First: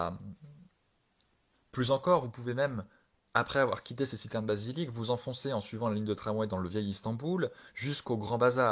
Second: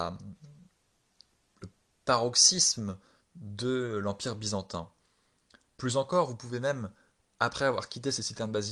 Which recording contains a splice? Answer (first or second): first